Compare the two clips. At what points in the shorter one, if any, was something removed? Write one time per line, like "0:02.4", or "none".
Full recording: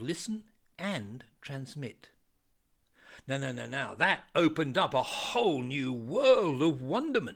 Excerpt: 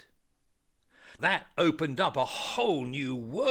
0:01.2